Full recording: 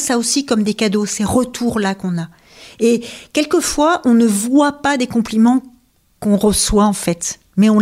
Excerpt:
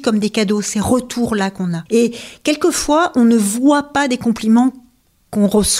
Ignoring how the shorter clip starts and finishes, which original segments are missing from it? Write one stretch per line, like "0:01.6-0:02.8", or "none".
0:02.3-0:02.8